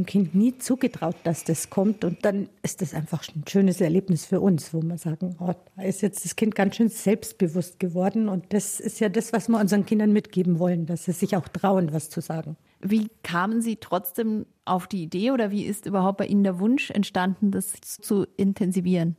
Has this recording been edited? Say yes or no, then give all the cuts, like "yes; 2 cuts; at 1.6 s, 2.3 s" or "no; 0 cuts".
yes; 2 cuts; at 12.8 s, 18.0 s